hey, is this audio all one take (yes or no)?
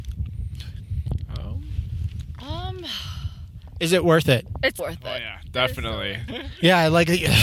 no